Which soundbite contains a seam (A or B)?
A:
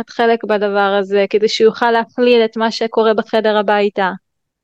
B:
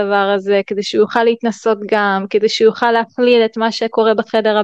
A